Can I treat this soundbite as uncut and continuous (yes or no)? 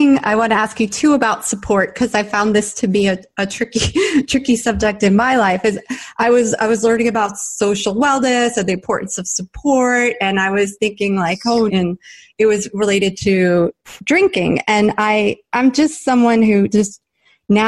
no